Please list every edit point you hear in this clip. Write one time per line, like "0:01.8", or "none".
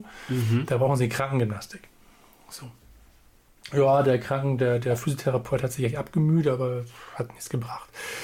none

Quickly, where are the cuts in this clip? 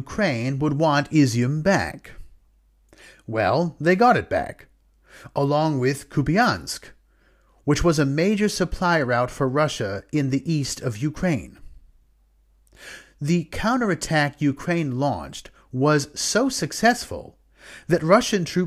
none

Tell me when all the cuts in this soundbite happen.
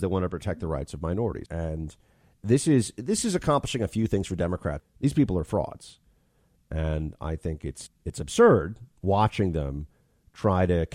0:01.5
0:04.8
0:07.9

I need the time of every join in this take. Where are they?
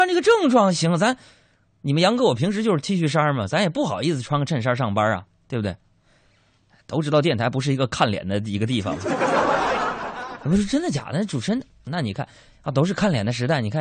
none

